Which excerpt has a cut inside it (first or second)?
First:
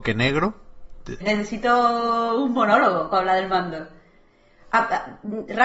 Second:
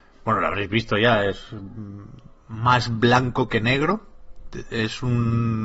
first